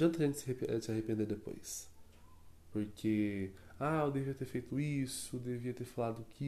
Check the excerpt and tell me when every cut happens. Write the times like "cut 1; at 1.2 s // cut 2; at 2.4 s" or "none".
none